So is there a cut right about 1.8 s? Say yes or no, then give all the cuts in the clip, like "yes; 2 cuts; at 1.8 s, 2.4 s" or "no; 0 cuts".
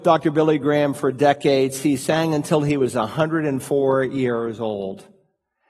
no; 0 cuts